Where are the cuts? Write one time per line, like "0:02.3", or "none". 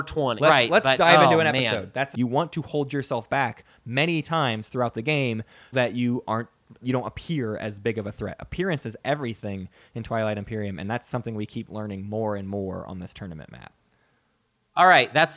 0:02.1
0:05.7
0:06.8